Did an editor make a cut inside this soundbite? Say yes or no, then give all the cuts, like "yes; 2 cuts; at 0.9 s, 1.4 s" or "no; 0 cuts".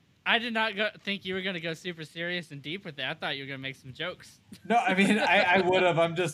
no; 0 cuts